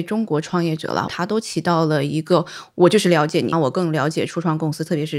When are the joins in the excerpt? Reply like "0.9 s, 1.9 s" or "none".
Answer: 1.1 s, 3.5 s